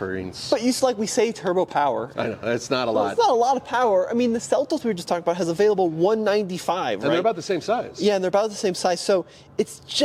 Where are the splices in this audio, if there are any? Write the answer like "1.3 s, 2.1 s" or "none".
2.1 s